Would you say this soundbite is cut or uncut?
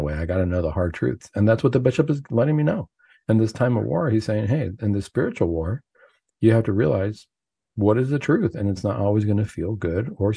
uncut